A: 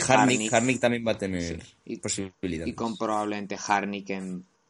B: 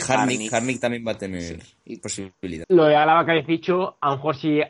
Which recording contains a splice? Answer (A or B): B